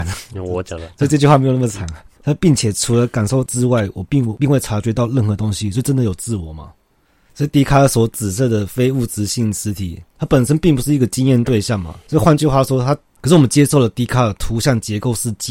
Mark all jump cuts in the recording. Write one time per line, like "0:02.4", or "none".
0:07.3
0:13.2